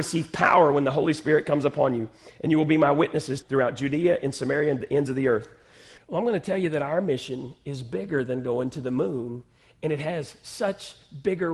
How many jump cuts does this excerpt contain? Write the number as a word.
two